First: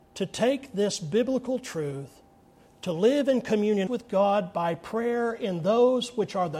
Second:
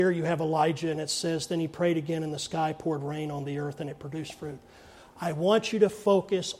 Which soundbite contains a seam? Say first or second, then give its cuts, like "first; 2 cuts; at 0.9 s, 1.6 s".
first; 1 cut; at 3.9 s